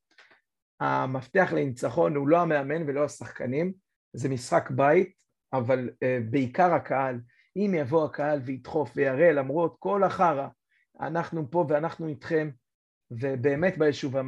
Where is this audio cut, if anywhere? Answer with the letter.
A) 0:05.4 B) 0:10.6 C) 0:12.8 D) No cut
A